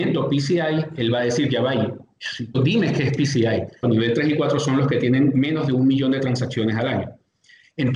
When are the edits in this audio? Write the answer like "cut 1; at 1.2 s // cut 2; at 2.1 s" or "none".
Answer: cut 1; at 2.5 s // cut 2; at 3.8 s